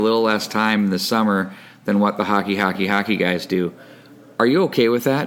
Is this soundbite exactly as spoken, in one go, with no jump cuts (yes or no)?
yes